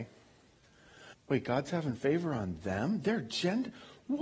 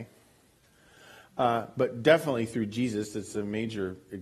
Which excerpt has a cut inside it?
first; 1 cut; at 1.1 s

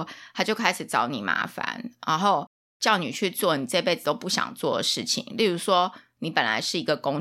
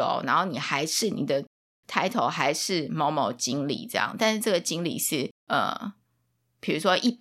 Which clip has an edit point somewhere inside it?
second; 1 cut; at 5.4 s

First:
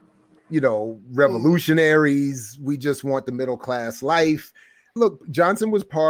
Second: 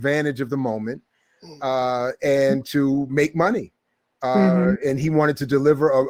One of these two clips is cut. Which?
first; 1 cut; at 5.0 s

